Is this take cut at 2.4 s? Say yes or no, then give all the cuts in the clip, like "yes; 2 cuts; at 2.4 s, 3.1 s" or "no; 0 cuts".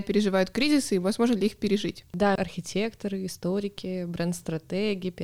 yes; 1 cut; at 2.4 s